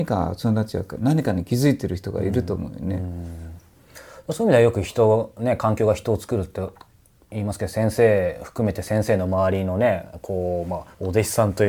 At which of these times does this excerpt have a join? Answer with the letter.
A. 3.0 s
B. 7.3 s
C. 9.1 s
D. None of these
D